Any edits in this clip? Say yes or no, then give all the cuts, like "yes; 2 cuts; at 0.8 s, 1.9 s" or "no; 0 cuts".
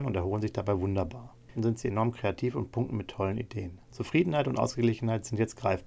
yes; 2 cuts; at 1.5 s, 3.9 s